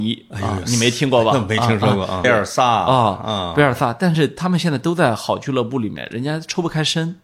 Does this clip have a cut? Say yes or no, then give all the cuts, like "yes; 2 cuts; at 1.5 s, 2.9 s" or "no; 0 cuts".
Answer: yes; 1 cut; at 2.2 s